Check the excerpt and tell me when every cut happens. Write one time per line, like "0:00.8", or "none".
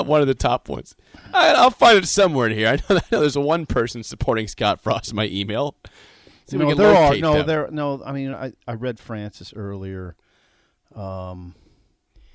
none